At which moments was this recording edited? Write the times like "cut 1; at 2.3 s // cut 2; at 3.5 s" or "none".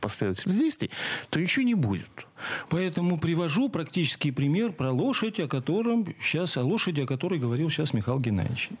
cut 1; at 2.7 s